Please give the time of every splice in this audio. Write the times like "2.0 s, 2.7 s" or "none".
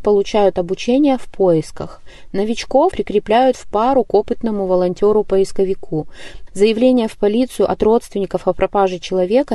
2.9 s, 6.5 s